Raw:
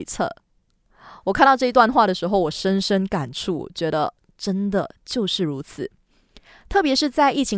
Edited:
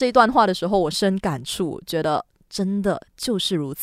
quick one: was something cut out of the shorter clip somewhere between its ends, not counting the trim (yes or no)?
yes